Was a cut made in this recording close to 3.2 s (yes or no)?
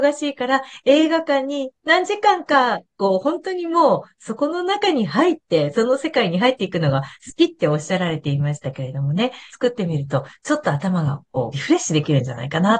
no